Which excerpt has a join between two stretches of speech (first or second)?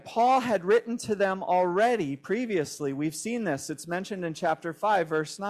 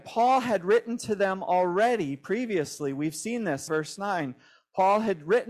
second